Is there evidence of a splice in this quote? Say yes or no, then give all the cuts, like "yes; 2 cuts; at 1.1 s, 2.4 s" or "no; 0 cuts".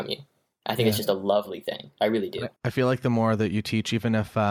yes; 1 cut; at 2.6 s